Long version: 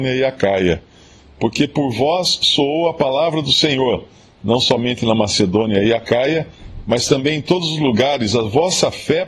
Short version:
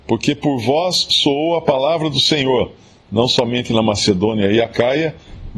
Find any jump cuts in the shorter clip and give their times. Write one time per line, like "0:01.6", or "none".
none